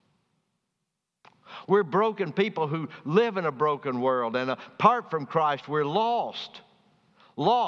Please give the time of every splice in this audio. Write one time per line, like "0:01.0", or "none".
0:01.7